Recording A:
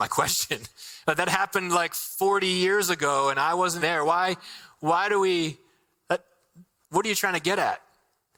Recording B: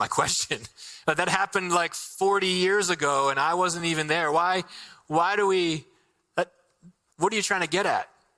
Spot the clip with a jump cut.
A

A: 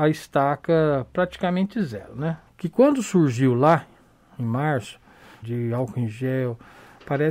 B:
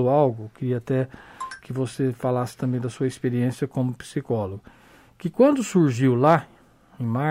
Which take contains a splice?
A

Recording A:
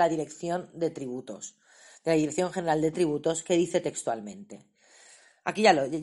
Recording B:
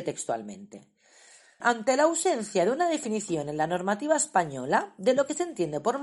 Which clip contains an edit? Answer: B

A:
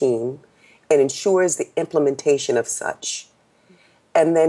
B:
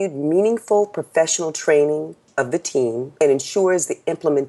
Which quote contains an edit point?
B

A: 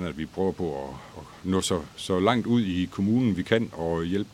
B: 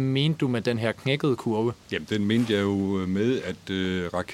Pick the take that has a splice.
B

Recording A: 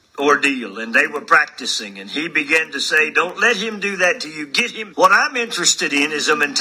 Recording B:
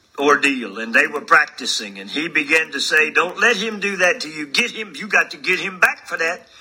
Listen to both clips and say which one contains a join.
A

